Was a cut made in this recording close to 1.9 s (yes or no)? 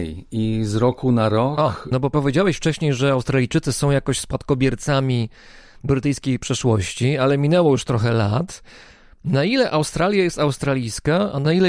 yes